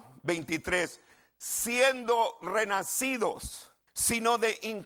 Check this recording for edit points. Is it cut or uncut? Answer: cut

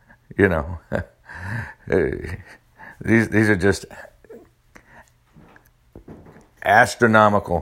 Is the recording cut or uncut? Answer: uncut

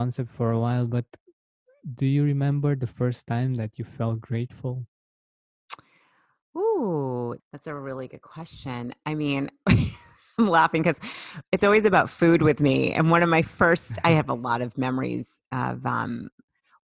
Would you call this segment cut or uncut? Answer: cut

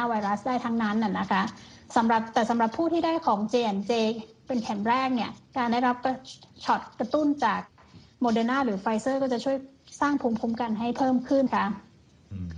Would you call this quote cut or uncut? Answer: cut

